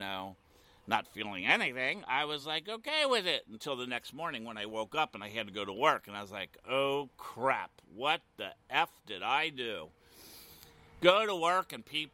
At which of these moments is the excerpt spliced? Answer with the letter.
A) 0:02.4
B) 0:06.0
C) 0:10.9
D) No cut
D